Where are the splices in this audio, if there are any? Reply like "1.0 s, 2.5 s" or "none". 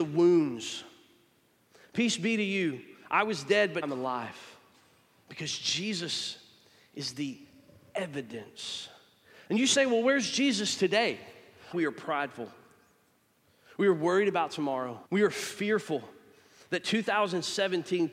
3.8 s, 11.7 s, 15.1 s